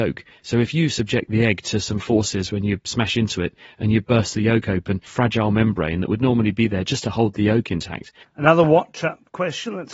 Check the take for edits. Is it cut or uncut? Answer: cut